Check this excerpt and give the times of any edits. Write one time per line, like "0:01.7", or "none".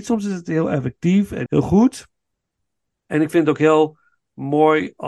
0:01.5